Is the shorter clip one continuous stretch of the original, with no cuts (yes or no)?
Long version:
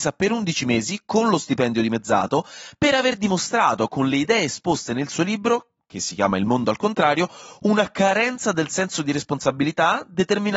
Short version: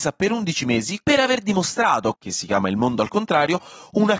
no